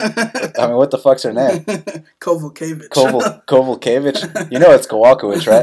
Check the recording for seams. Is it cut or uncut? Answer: uncut